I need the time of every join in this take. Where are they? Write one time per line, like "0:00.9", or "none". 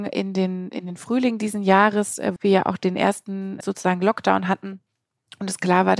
0:02.4
0:03.6